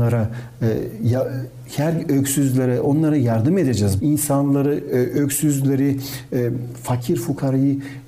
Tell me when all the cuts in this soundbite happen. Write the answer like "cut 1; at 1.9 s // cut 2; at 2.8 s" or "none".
cut 1; at 4.0 s